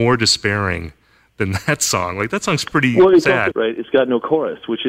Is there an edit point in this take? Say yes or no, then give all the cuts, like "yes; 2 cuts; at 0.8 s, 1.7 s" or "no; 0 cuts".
yes; 1 cut; at 3.5 s